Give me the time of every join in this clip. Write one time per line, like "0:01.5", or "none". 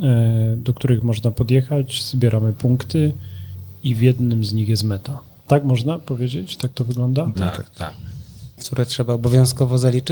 0:07.3
0:08.6